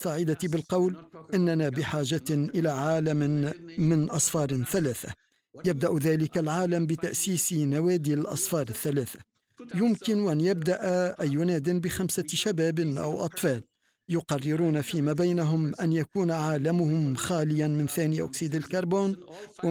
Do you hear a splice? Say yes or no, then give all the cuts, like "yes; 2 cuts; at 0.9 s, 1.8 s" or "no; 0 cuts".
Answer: no; 0 cuts